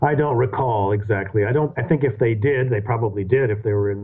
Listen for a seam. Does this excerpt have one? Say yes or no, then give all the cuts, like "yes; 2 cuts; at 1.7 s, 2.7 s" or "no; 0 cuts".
no; 0 cuts